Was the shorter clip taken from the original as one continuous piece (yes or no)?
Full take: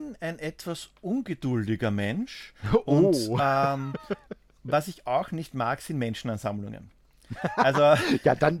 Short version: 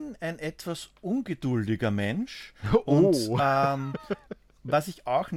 yes